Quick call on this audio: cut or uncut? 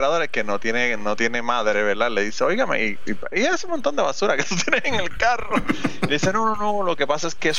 uncut